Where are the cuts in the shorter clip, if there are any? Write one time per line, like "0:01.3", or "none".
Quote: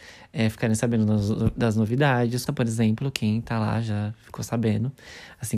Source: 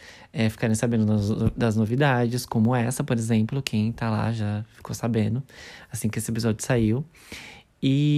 0:02.5